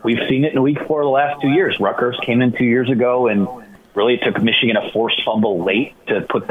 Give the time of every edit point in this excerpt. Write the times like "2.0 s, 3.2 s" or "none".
none